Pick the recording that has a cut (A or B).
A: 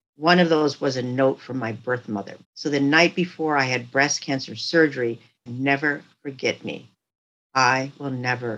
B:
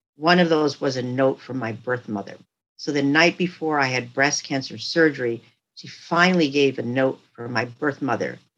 A